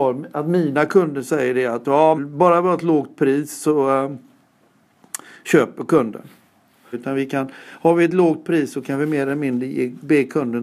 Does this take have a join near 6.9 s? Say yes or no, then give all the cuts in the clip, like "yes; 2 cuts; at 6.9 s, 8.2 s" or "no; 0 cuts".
yes; 2 cuts; at 2.2 s, 6.9 s